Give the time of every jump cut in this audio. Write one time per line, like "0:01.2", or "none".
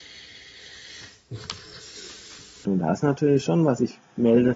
0:02.6